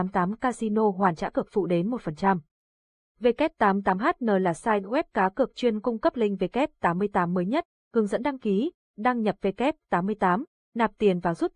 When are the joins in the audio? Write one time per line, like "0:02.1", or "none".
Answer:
none